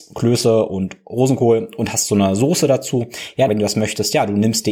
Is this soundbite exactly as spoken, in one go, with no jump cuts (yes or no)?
no